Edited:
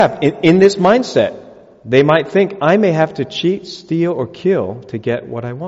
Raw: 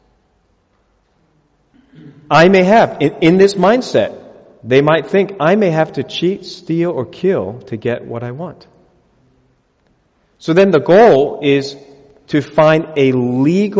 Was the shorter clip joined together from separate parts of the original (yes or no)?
no